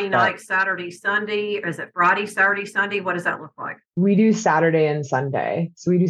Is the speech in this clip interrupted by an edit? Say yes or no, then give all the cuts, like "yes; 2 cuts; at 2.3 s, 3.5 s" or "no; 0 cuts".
yes; 1 cut; at 3.8 s